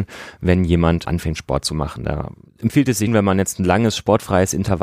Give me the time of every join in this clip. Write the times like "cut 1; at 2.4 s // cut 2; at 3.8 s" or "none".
cut 1; at 1.0 s // cut 2; at 3.1 s